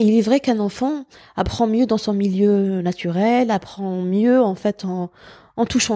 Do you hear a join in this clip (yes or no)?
no